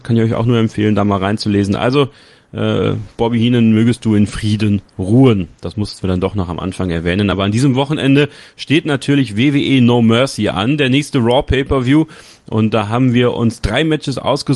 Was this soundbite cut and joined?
no; 0 cuts

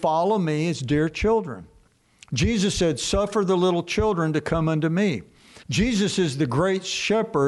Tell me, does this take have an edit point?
yes; 1 cut; at 5.6 s

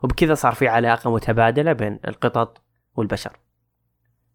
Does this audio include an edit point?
no; 0 cuts

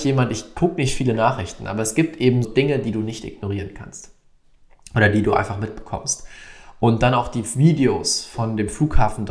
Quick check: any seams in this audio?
yes; 1 cut; at 2.4 s

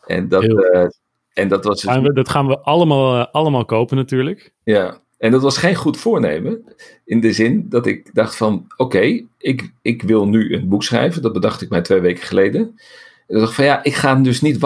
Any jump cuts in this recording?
no; 0 cuts

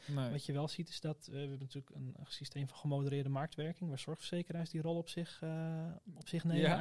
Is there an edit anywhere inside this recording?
no; 0 cuts

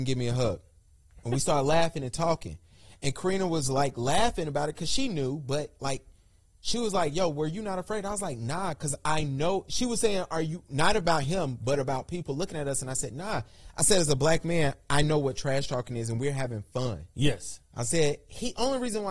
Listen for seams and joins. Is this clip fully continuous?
yes; 0 cuts

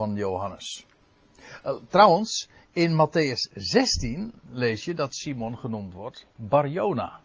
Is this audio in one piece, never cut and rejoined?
yes; 0 cuts

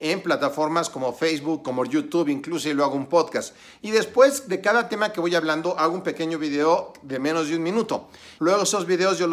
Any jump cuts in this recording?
yes; 1 cut; at 8.4 s

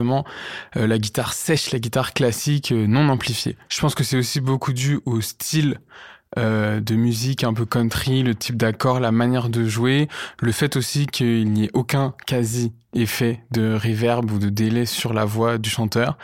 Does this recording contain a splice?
no; 0 cuts

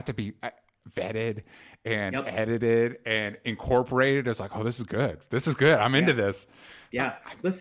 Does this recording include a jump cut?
no; 0 cuts

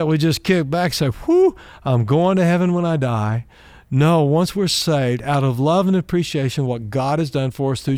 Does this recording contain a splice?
no; 0 cuts

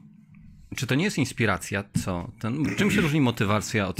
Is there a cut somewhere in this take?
yes; 1 cut; at 1.9 s

